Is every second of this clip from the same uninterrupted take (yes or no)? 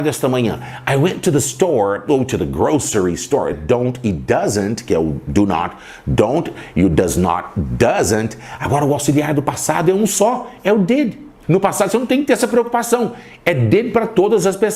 no